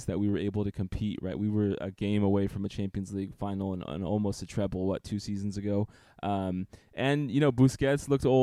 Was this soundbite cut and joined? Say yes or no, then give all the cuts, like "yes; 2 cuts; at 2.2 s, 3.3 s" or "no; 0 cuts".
no; 0 cuts